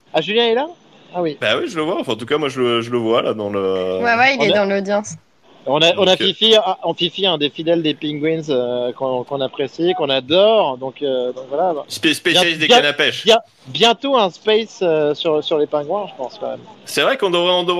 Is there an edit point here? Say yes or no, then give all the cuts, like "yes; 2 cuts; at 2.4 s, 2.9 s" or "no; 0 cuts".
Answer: no; 0 cuts